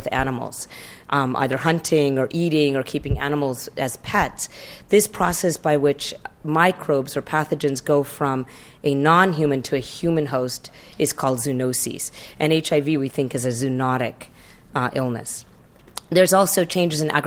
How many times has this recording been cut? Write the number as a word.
zero